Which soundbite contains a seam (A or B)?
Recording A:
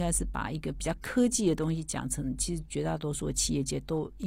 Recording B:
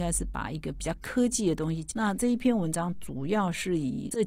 B